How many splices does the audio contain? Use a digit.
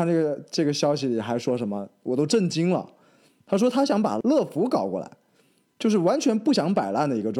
0